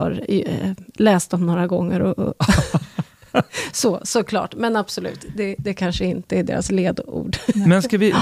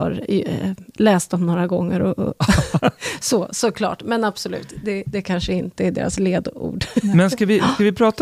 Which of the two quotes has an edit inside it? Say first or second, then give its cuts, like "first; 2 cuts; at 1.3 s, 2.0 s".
second; 1 cut; at 2.8 s